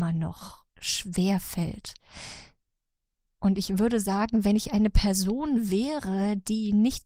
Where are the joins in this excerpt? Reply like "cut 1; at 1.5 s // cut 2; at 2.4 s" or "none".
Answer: none